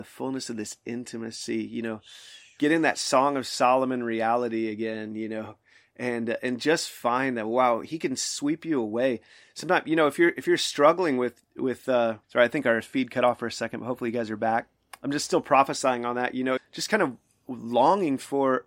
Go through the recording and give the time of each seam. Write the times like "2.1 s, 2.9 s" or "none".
12.2 s, 16.6 s